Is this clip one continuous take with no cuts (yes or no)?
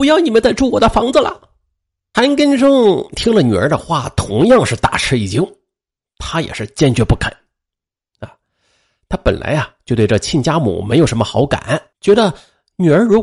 no